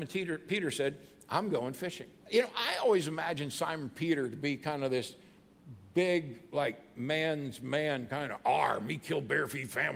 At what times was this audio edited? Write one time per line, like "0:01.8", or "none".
0:02.2

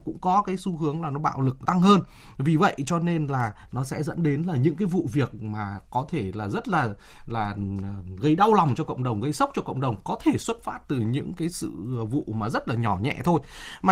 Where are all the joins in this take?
0:01.7

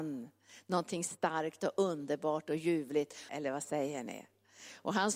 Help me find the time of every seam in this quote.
0:03.3

